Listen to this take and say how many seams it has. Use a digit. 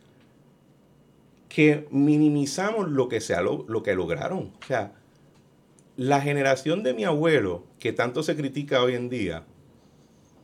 1